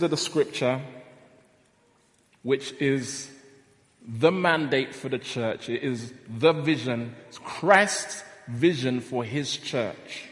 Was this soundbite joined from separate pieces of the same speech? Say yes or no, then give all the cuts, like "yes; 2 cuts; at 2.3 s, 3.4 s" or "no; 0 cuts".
no; 0 cuts